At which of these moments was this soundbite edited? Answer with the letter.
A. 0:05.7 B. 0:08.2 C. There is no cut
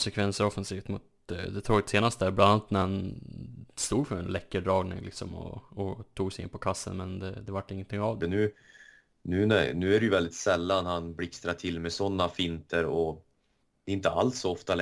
B